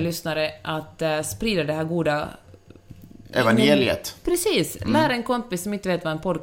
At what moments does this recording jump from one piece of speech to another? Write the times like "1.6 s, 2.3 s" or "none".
none